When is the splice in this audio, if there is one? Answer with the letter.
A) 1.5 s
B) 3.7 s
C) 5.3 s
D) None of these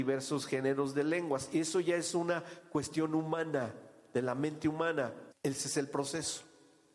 C